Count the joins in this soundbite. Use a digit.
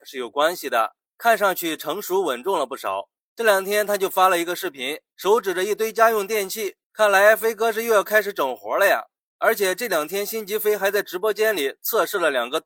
1